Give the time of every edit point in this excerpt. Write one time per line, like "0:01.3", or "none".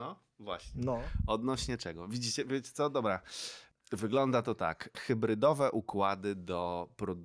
0:04.9